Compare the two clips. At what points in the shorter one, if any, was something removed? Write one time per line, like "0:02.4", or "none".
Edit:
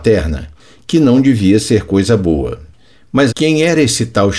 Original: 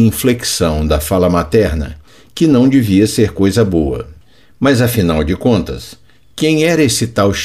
0:03.3